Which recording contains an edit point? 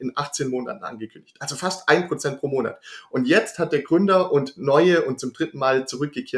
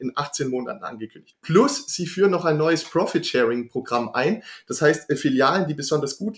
second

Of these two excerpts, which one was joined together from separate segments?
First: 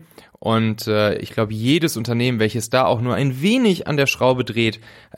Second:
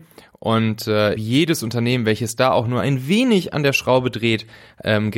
second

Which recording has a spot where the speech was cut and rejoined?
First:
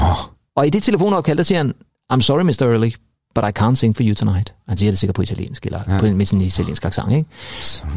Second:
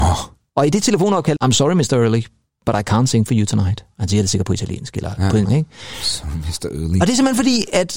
second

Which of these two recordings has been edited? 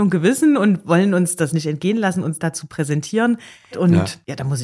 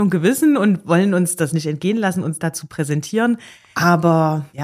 first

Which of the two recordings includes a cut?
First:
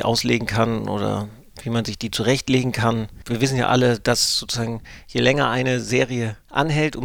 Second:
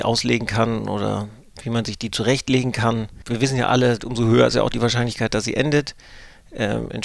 second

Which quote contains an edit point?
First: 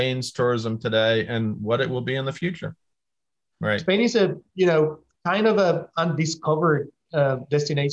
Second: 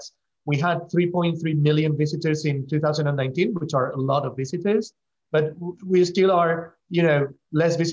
first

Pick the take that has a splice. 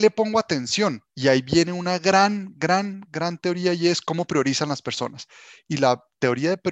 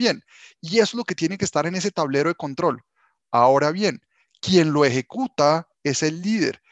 first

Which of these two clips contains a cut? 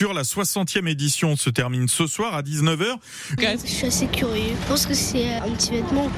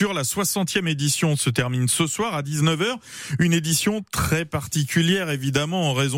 first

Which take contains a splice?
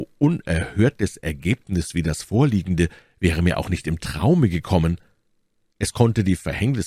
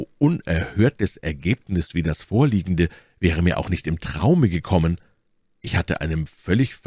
second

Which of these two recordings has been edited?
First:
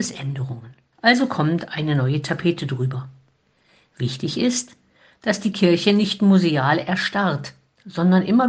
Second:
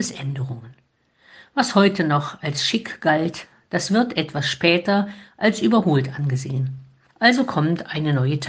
first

